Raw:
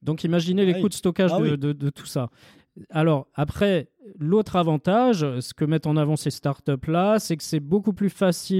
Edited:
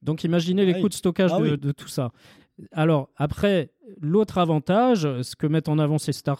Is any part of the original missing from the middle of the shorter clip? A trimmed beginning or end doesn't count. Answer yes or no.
yes